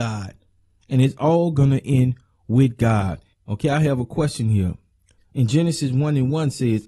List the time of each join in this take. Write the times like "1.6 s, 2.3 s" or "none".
3.3 s, 5.2 s